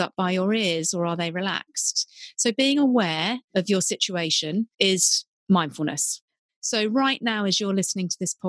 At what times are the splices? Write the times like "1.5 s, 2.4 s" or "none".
4.7 s, 6.5 s